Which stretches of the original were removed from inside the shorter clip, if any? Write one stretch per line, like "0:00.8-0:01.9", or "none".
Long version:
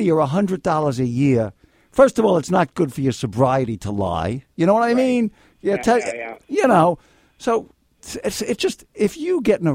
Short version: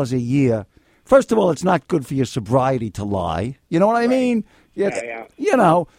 0:05.8-0:06.0